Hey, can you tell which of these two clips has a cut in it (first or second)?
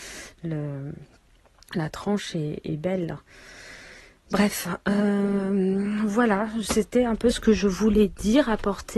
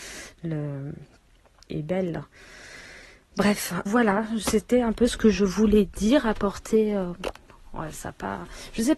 second